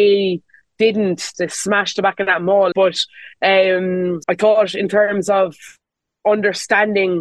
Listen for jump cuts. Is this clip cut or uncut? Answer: cut